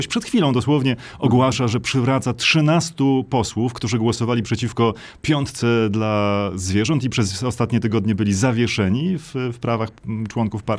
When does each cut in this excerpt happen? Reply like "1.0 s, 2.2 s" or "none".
none